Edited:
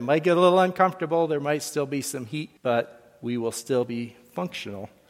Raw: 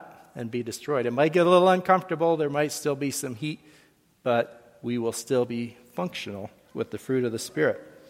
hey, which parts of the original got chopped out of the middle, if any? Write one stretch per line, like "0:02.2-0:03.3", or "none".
0:03.7-0:04.2